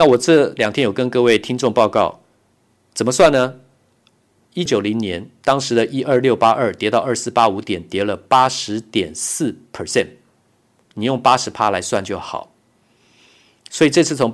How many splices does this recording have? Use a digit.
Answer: 1